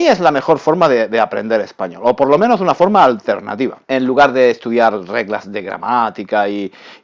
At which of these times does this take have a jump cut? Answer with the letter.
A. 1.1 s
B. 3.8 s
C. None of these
B